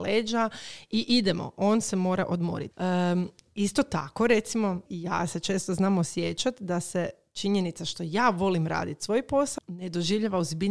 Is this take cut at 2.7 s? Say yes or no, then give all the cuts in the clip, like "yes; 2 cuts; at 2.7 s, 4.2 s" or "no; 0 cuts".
yes; 3 cuts; at 2.7 s, 4.9 s, 9.6 s